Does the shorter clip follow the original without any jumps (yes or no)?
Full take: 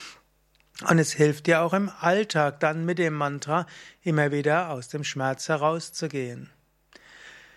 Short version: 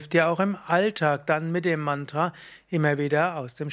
yes